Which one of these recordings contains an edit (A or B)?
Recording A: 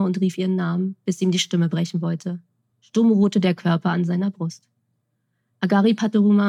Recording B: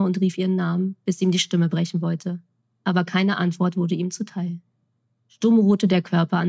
A